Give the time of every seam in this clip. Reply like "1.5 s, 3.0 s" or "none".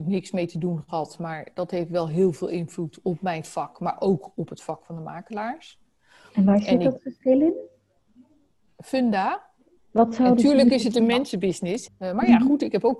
9.8 s, 11.9 s